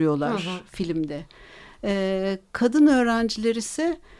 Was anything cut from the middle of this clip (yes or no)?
no